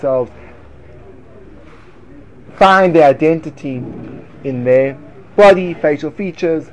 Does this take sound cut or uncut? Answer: uncut